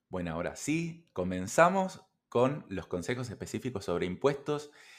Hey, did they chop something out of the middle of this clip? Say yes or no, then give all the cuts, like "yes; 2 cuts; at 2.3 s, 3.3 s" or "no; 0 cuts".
no; 0 cuts